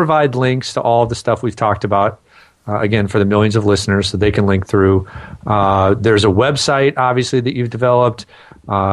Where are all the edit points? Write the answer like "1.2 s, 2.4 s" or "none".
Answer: none